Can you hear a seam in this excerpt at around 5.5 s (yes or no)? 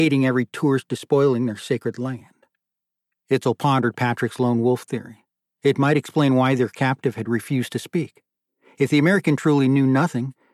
no